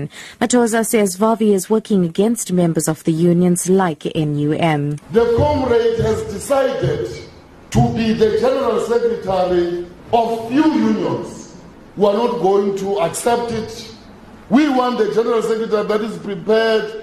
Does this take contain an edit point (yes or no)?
yes